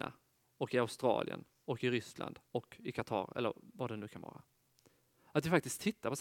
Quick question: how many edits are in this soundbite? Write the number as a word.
one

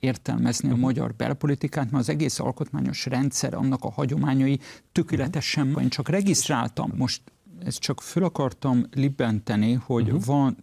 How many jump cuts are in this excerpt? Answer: two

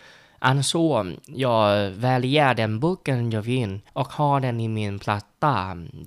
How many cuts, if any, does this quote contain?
one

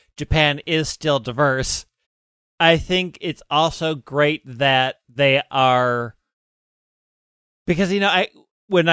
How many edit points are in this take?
one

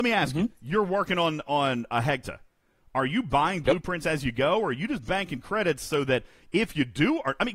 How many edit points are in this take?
one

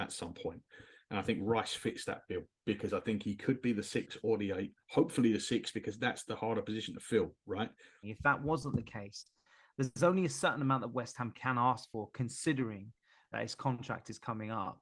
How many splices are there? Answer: one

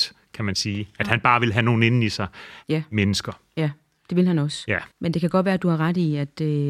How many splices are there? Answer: two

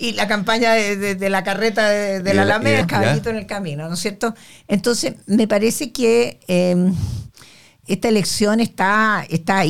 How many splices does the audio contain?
two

